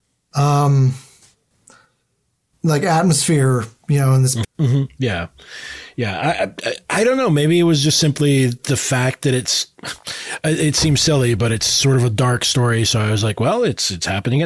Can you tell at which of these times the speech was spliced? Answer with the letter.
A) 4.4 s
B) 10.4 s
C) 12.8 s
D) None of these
A